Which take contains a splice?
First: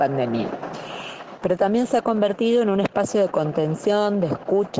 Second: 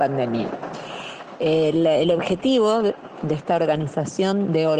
first; 1 cut; at 1.4 s

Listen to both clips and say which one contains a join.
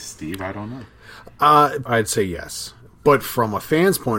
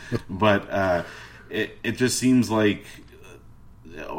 first; 1 cut; at 1.9 s

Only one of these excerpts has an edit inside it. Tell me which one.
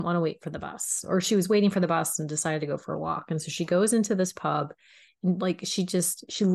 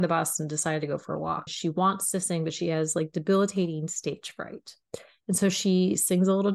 second; 1 cut; at 1.5 s

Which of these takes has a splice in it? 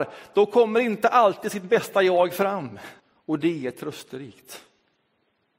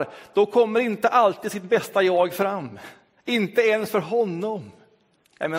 first; 1 cut; at 3.0 s

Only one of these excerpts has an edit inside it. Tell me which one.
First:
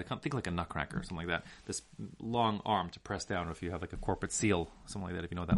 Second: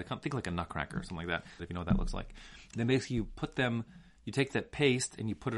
second; 2 cuts; at 1.6 s, 2.7 s

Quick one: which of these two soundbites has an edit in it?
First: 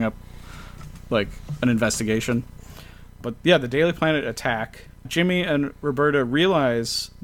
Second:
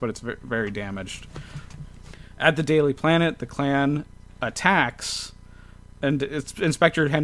first; 1 cut; at 5.0 s

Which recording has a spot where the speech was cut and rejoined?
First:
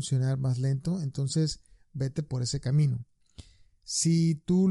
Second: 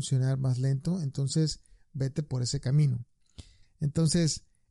second; 1 cut; at 3.6 s

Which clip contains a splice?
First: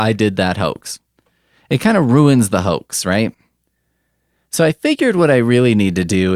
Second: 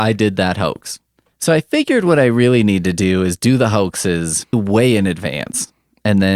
second; 2 cuts; at 1.3 s, 4.5 s

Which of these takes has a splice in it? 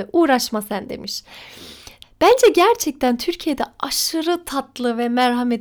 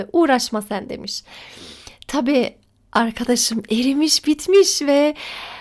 first; 1 cut; at 2.0 s

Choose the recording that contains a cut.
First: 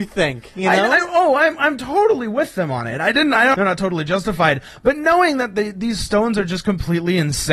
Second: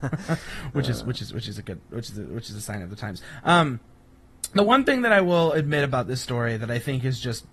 first; 1 cut; at 3.5 s

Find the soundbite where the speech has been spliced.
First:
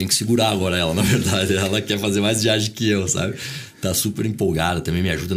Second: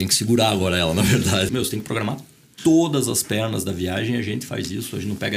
second; 1 cut; at 1.5 s

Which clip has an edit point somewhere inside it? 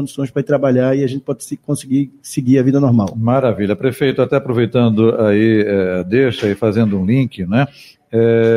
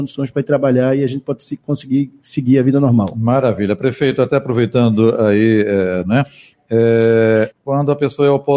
second; 2 cuts; at 6.0 s, 7.5 s

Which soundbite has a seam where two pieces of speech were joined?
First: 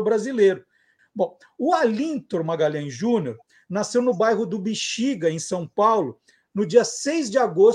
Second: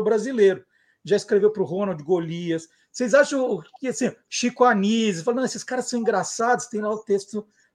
first; 1 cut; at 1.0 s

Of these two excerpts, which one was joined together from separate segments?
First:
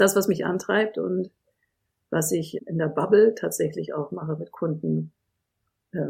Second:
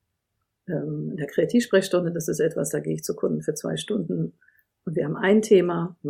first; 1 cut; at 2.6 s

